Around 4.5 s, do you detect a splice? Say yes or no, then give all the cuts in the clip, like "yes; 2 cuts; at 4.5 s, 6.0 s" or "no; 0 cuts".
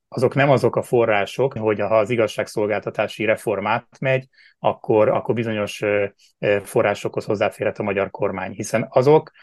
no; 1 cut; at 1.6 s